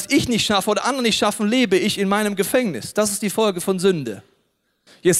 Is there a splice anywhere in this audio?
no; 0 cuts

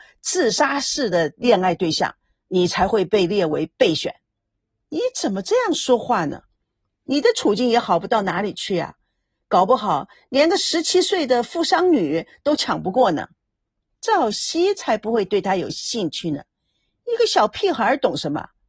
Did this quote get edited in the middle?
no; 0 cuts

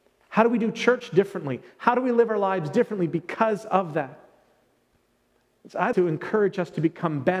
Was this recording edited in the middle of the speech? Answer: yes; 1 cut; at 5.9 s

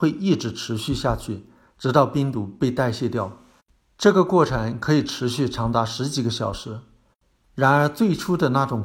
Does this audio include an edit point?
yes; 1 cut; at 7.4 s

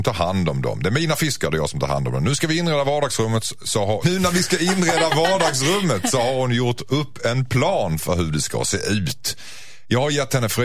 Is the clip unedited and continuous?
no; 1 cut; at 4.0 s

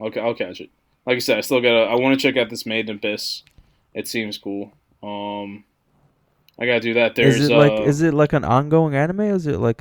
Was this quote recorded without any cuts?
yes; 0 cuts

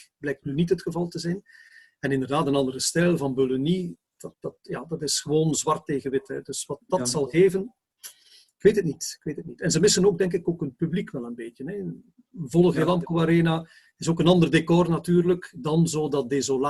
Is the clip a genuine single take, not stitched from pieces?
yes; 0 cuts

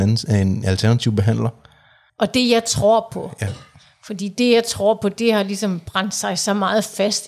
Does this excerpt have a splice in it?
yes; 1 cut; at 2.1 s

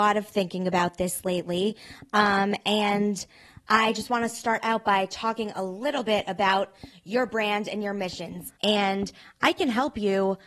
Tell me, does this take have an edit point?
yes; 1 cut; at 8.6 s

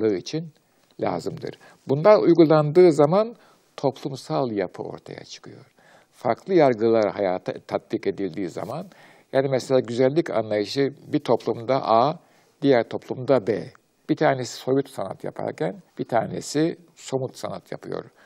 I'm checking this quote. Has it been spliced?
yes; 2 cuts; at 14.0 s, 15.9 s

